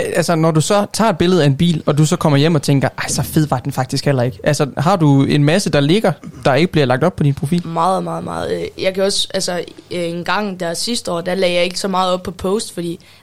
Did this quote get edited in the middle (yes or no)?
no